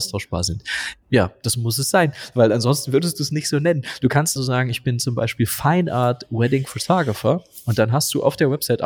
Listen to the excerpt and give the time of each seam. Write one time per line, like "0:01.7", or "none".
0:01.0
0:04.4